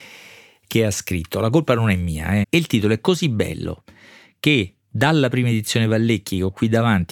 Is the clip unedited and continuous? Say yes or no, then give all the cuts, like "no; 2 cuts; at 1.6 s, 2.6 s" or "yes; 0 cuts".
no; 1 cut; at 2.4 s